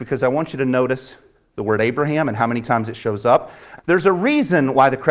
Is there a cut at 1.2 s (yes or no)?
no